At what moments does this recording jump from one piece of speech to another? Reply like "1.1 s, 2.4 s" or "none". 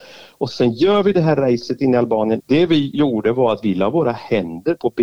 2.4 s